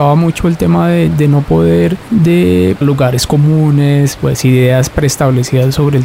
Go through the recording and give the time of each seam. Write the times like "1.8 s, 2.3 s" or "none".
2.8 s